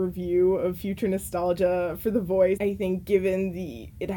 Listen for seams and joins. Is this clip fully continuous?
no; 1 cut; at 2.6 s

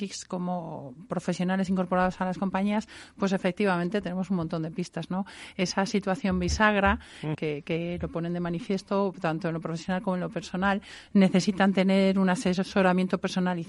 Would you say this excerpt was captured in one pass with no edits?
no; 2 cuts; at 7.3 s, 11.1 s

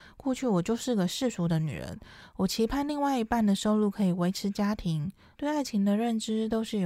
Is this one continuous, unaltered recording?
no; 1 cut; at 5.3 s

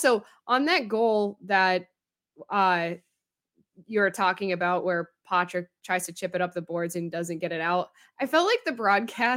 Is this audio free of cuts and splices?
yes; 0 cuts

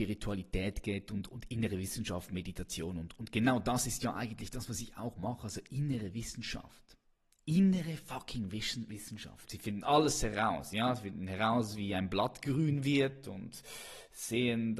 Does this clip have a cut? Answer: yes; 1 cut; at 9.5 s

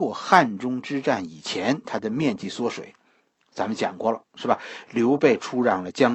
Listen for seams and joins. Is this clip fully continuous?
yes; 0 cuts

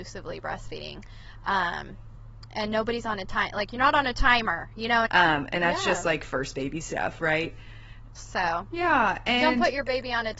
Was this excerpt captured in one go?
no; 2 cuts; at 5.0 s, 8.1 s

